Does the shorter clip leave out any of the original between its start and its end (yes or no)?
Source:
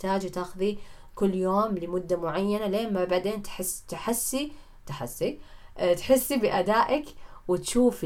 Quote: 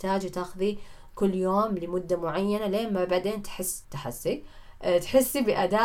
yes